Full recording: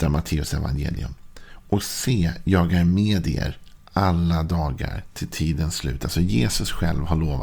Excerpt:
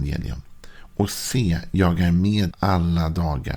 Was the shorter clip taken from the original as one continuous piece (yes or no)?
no